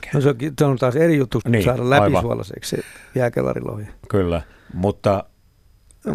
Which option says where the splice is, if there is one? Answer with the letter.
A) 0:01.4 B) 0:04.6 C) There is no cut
A